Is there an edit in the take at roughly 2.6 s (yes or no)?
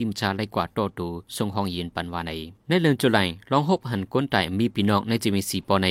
yes